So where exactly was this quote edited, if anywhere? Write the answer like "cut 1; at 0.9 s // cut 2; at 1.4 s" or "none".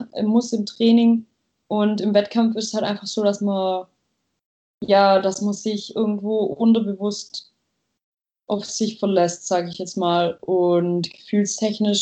none

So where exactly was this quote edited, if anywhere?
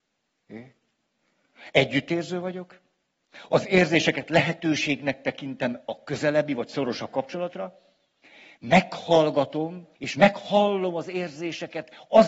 cut 1; at 1.7 s // cut 2; at 10.0 s

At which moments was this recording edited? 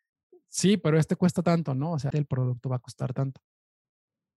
cut 1; at 2.1 s

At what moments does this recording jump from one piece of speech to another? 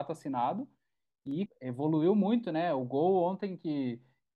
cut 1; at 1.5 s

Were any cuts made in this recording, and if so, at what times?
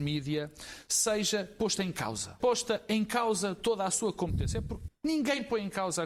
cut 1; at 2.4 s // cut 2; at 4.9 s

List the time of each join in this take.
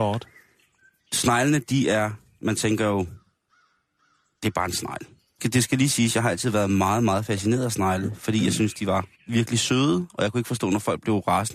cut 1; at 9.1 s

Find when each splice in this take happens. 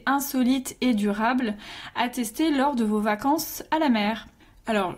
none

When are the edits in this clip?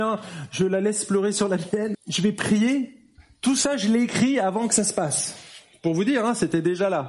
cut 1; at 1.9 s

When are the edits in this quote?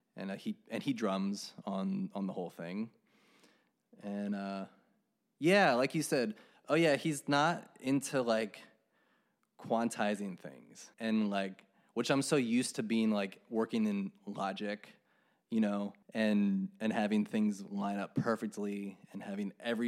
cut 1; at 10.9 s // cut 2; at 16.0 s

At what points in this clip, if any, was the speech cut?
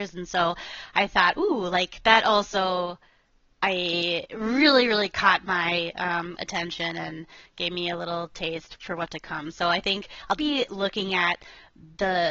cut 1; at 8.8 s // cut 2; at 10.4 s

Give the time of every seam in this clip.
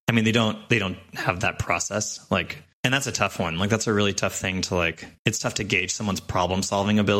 cut 1; at 2.7 s // cut 2; at 5.2 s

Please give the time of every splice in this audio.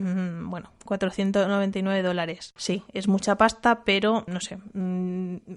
cut 1; at 2.6 s // cut 2; at 4.3 s

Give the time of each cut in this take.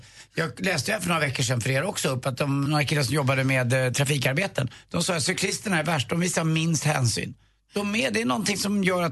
cut 1; at 2.7 s

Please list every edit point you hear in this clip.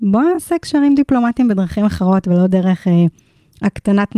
none

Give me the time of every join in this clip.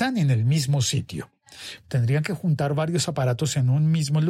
cut 1; at 1.8 s

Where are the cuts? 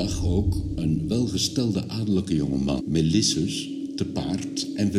cut 1; at 2.8 s

